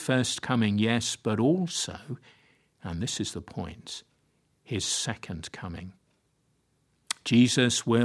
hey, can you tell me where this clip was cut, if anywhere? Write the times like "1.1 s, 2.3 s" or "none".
none